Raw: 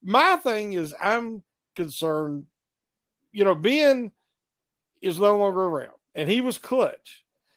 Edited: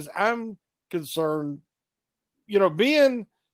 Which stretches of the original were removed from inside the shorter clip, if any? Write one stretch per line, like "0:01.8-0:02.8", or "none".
none